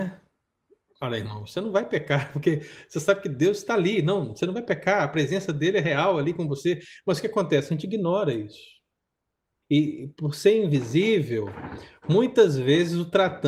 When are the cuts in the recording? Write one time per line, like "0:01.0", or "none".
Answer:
0:09.6